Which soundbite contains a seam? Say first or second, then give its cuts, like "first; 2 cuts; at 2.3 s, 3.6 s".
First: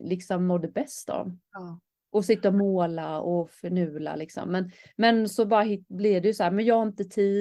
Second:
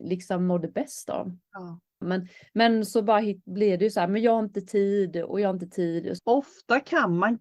second; 2 cuts; at 2.0 s, 6.2 s